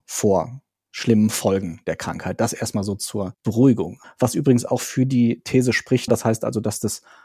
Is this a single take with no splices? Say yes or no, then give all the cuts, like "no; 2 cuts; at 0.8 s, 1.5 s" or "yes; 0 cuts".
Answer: no; 2 cuts; at 4.0 s, 6.1 s